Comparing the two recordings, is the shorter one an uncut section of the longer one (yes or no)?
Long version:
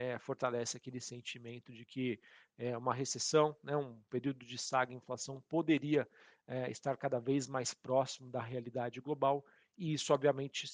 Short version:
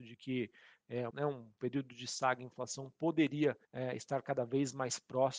no